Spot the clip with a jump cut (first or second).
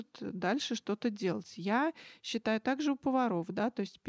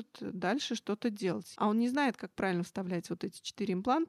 second